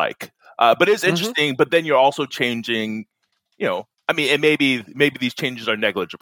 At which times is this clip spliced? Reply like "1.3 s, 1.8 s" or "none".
none